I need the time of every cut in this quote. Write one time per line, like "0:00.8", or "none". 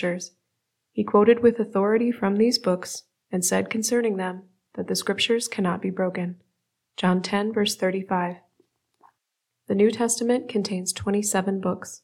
none